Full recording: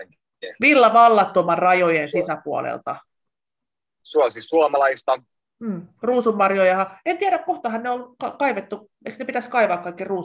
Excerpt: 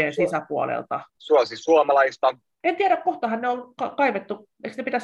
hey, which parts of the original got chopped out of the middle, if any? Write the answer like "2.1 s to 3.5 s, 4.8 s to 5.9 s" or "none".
3.1 s to 3.9 s, 5.5 s to 7.0 s